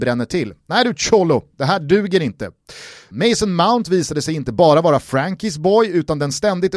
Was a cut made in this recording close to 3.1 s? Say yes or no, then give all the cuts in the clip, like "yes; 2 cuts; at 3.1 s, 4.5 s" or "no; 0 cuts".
yes; 1 cut; at 3.1 s